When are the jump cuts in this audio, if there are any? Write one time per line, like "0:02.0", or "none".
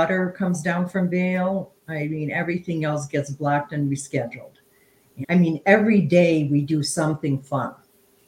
0:05.2